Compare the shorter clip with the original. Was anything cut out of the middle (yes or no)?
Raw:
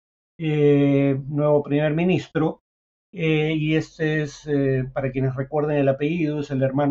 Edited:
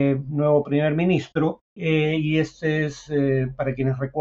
yes